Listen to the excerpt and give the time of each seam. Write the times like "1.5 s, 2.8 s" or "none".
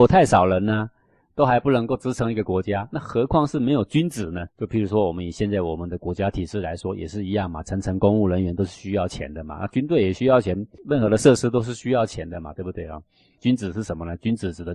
4.5 s, 13.4 s